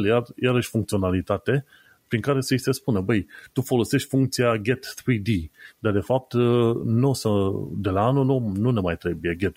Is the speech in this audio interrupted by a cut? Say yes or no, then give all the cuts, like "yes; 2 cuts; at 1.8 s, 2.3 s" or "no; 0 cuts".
no; 0 cuts